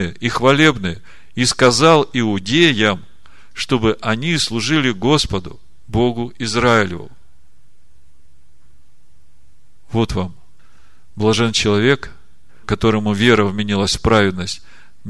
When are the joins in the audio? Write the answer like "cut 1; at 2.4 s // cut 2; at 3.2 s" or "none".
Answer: none